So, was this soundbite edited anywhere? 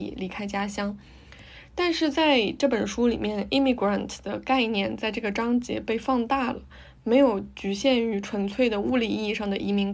no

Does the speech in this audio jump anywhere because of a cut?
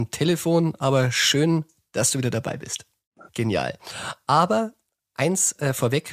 yes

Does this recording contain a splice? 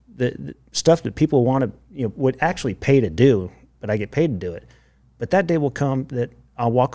no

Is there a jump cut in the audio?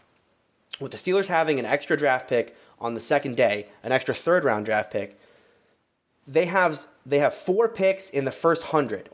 no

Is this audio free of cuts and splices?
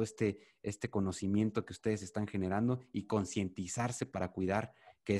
yes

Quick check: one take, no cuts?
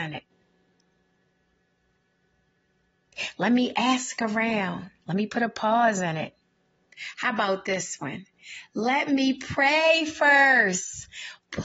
yes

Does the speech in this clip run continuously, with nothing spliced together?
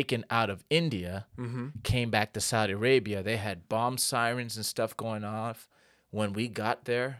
yes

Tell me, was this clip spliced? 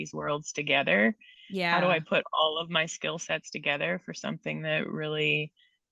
no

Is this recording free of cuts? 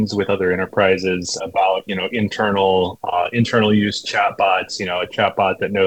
no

